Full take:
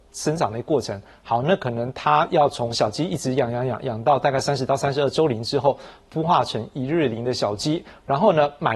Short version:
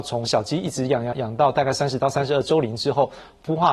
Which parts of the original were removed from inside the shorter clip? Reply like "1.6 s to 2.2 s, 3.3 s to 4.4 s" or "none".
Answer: 3.6 s to 3.8 s